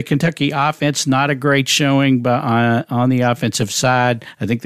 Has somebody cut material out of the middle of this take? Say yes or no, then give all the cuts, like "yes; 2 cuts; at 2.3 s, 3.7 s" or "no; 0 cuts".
no; 0 cuts